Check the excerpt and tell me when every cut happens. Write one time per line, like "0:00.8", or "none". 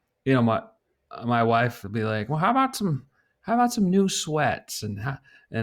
none